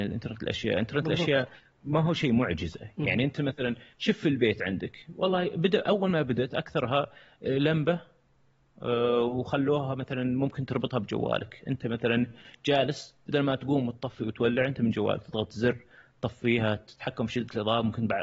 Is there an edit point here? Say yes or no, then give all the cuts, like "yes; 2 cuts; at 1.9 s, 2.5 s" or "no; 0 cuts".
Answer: no; 0 cuts